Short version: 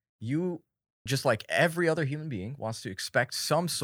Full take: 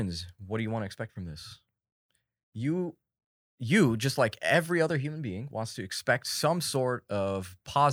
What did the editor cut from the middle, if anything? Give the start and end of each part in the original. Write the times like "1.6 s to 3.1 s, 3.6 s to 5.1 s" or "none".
3.4 s to 4.0 s